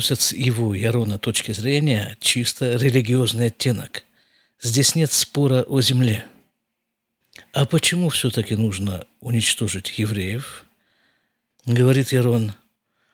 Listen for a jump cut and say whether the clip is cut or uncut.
uncut